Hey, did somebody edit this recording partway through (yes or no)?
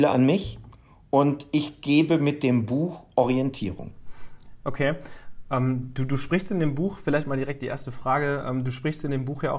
no